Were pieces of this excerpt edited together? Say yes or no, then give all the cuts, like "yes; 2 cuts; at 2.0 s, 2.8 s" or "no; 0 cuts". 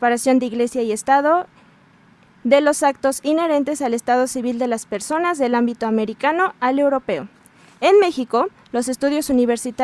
no; 0 cuts